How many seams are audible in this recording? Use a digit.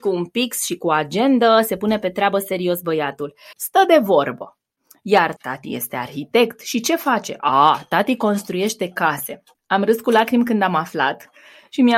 2